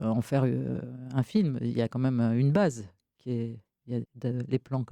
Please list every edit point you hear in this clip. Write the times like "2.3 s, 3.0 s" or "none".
4.0 s